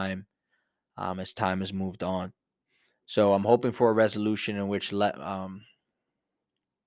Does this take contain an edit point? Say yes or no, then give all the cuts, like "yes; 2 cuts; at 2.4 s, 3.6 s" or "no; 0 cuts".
no; 0 cuts